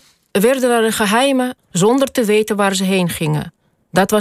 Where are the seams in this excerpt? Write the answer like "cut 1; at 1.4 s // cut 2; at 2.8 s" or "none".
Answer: cut 1; at 1.6 s